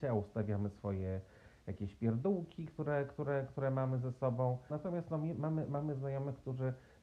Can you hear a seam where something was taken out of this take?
yes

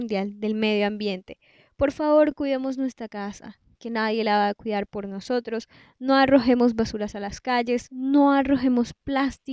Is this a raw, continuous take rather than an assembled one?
yes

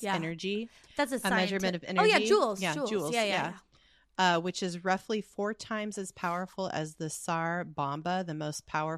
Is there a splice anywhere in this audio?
no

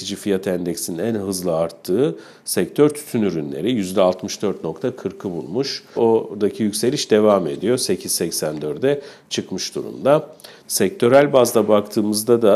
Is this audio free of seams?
no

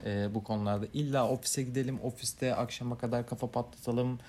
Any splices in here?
no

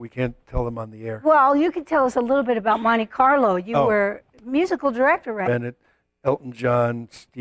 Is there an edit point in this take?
yes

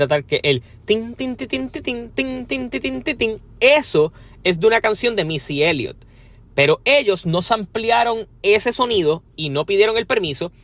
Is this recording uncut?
yes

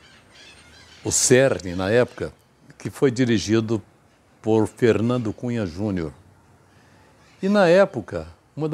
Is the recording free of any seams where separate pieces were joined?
yes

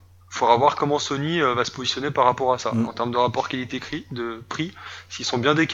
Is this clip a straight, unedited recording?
yes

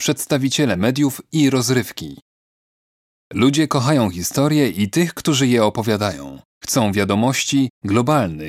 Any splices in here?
no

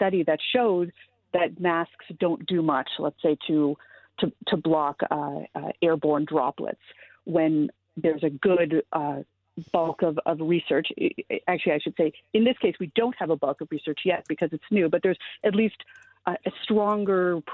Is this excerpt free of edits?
yes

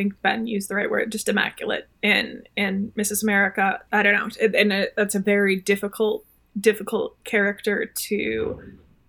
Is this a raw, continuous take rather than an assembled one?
yes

